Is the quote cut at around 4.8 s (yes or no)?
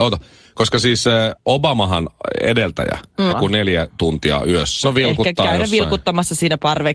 yes